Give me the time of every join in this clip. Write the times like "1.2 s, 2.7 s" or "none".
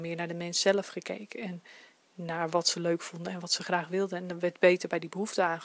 none